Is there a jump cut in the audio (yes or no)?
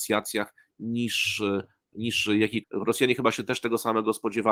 yes